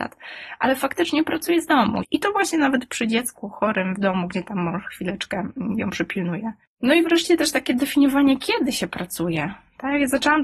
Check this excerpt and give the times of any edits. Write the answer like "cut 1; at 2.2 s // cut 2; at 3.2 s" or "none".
cut 1; at 2.0 s